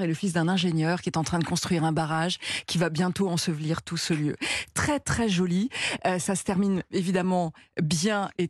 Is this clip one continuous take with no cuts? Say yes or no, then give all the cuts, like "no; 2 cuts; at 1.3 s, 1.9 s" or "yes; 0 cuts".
yes; 0 cuts